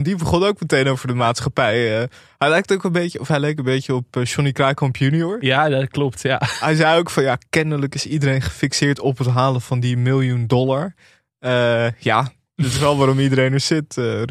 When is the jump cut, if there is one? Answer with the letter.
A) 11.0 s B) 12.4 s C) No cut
C